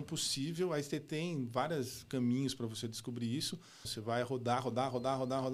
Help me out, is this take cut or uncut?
cut